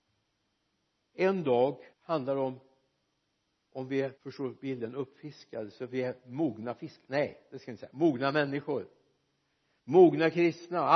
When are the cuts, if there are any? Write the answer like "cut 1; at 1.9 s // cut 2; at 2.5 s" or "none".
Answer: cut 1; at 1.9 s // cut 2; at 4.2 s